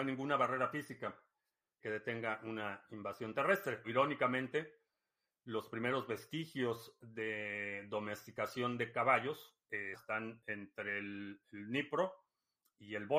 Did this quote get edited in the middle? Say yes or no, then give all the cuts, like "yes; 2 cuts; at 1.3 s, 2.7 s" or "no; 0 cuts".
yes; 3 cuts; at 1.8 s, 3.8 s, 9.9 s